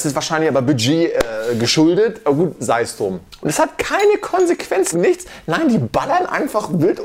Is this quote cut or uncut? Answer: cut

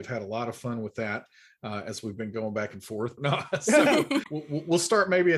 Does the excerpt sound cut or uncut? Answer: cut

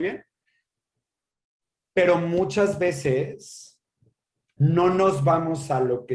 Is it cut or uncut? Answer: uncut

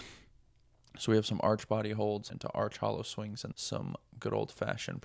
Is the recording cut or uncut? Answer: cut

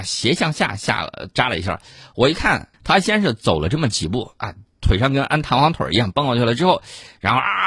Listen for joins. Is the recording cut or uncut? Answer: cut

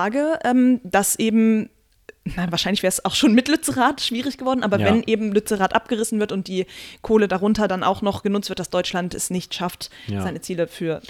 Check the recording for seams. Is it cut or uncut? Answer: uncut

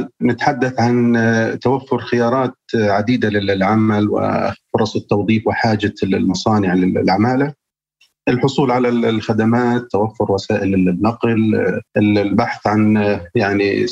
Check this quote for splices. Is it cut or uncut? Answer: cut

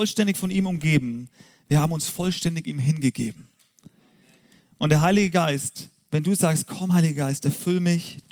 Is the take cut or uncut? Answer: uncut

